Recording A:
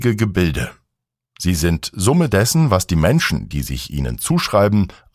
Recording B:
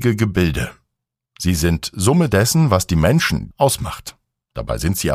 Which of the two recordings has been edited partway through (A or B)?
B